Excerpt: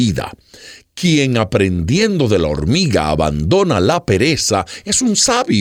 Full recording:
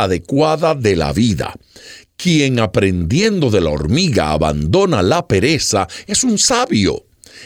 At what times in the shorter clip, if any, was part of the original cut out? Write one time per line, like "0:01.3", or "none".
none